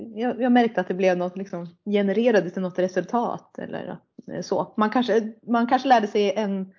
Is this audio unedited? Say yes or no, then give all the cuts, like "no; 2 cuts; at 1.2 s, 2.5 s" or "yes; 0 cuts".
yes; 0 cuts